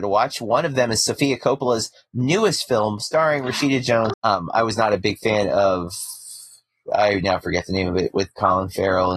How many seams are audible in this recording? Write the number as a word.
one